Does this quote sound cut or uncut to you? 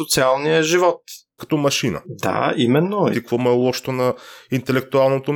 cut